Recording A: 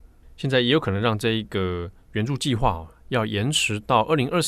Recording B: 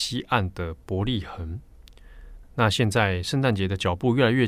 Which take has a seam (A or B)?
B